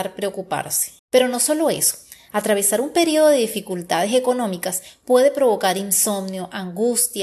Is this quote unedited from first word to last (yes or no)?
no